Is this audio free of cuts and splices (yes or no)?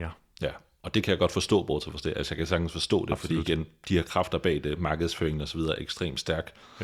yes